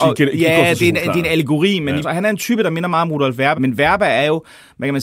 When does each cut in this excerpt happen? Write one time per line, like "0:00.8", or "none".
0:02.0
0:03.5